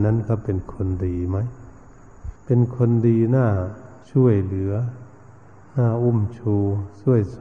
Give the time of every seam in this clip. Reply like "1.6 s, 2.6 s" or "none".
2.4 s